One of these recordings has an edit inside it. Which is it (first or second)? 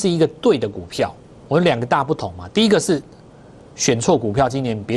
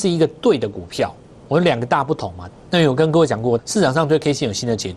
second